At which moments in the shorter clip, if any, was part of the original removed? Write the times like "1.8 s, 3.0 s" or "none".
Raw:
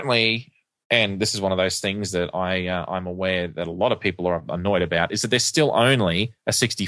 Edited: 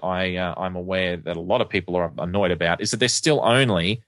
none